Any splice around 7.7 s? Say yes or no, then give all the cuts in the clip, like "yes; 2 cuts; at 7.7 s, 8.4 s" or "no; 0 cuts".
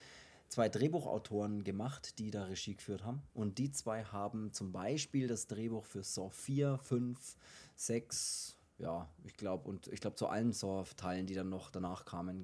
no; 1 cut; at 3.3 s